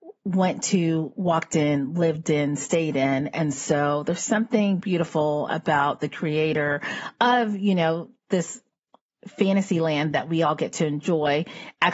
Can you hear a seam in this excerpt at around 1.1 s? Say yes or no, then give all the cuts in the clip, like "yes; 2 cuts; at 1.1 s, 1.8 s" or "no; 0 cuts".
no; 0 cuts